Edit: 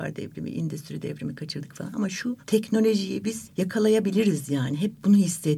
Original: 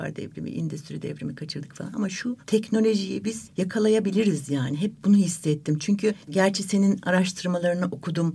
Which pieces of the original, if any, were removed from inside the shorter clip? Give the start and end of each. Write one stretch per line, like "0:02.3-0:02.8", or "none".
none